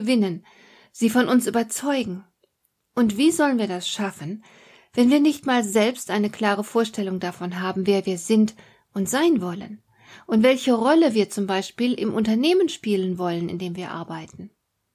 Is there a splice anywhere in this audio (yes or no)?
no